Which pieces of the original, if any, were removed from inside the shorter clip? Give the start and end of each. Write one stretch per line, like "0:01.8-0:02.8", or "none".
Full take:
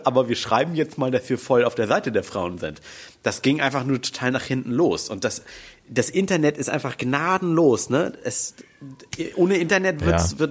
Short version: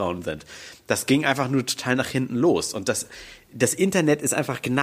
none